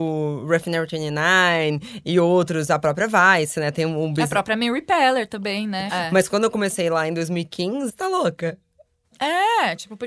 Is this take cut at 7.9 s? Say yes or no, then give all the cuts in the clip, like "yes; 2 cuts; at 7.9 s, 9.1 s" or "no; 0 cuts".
yes; 2 cuts; at 5.9 s, 7.9 s